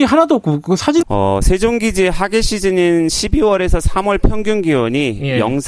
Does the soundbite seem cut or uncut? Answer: cut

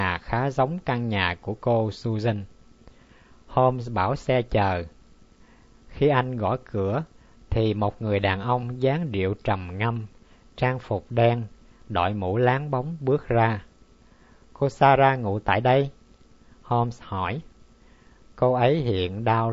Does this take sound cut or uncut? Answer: uncut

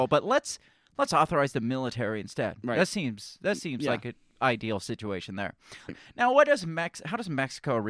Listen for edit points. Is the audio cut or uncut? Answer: cut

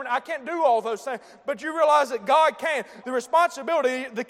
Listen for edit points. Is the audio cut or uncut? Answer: cut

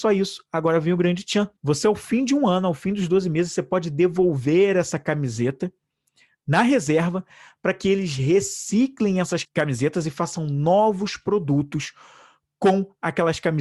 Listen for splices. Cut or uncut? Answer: cut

